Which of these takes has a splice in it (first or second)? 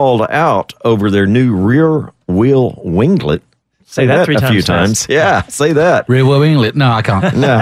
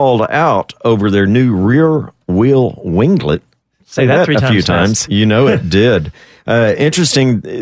second